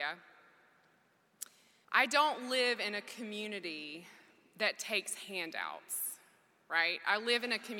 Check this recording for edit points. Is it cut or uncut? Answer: cut